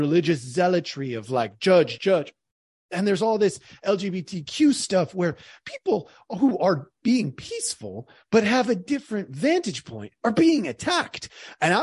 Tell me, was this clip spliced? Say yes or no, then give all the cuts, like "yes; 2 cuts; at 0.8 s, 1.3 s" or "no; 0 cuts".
yes; 2 cuts; at 2.0 s, 7.0 s